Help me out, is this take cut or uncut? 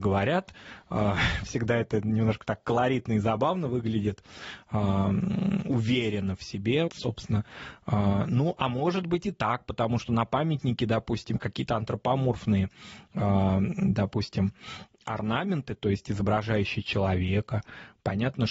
cut